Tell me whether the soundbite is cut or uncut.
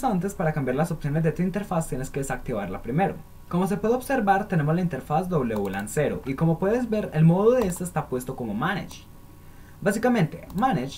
cut